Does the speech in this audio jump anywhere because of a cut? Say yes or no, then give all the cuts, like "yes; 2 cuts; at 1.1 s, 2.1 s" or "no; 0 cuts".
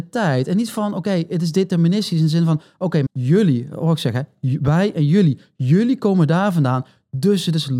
yes; 1 cut; at 3.1 s